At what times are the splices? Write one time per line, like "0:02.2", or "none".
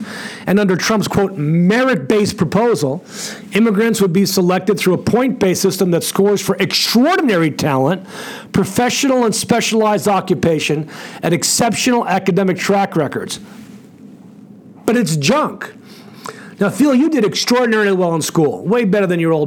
none